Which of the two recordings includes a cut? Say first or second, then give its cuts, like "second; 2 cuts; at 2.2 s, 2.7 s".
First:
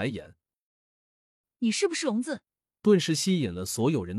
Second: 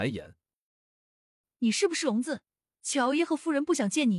first; 1 cut; at 2.7 s